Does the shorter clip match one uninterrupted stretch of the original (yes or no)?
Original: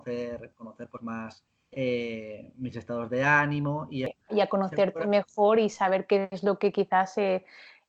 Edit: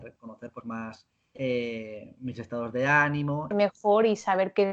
no